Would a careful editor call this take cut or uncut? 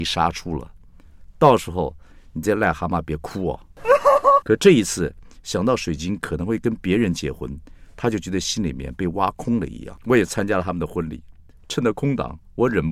cut